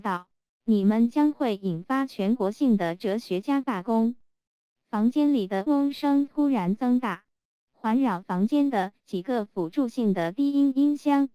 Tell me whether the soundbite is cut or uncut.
cut